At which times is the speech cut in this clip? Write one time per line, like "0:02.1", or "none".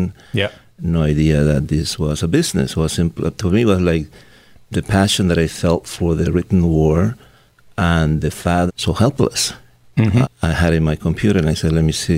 0:08.7
0:10.2